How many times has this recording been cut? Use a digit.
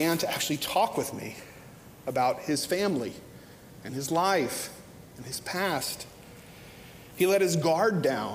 1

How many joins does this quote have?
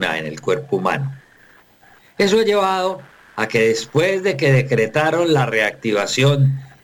0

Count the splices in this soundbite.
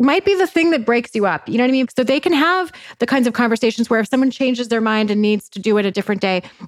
0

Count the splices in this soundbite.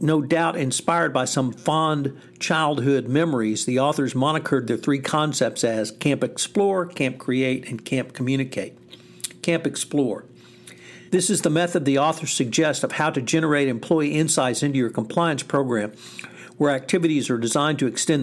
1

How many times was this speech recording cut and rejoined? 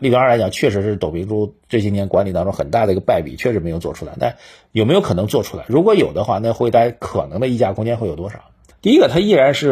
1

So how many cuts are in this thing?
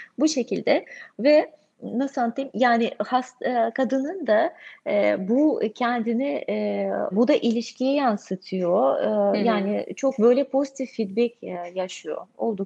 1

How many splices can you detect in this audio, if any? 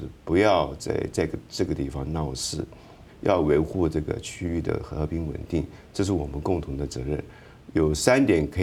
2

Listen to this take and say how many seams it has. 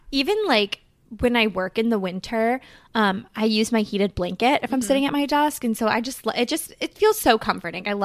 0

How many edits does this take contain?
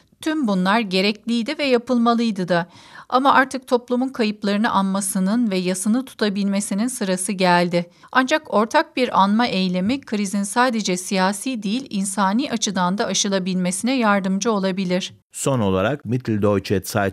2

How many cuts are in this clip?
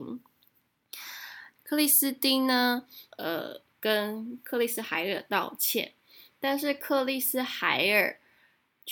2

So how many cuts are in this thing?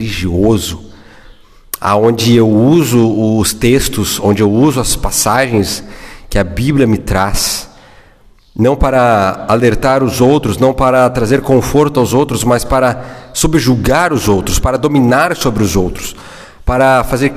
0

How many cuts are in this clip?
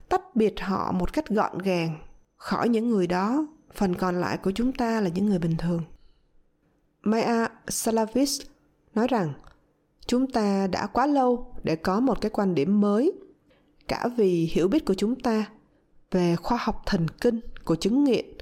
0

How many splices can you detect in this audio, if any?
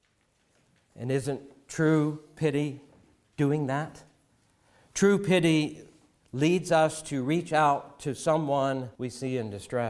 1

